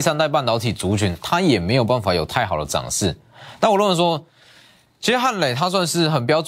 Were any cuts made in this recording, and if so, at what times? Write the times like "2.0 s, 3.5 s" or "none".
none